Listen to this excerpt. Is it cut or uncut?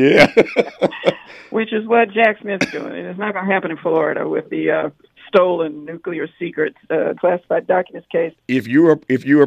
cut